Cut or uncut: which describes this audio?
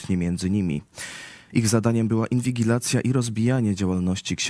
cut